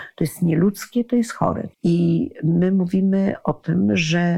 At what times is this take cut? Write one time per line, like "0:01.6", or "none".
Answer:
0:01.7